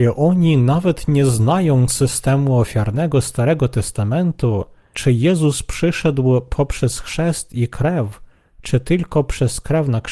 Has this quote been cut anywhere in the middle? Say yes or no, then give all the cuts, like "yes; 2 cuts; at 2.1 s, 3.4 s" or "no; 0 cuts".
yes; 1 cut; at 4.9 s